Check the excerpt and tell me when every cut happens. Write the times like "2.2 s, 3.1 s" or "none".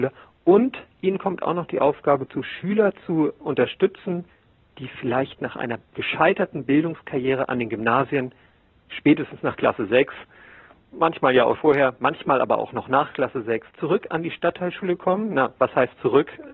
11.6 s, 13.7 s